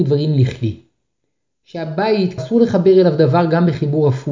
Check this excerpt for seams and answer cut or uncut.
cut